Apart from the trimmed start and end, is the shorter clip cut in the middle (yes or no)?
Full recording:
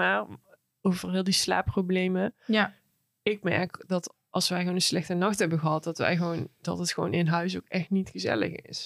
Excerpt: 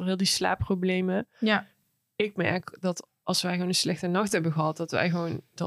no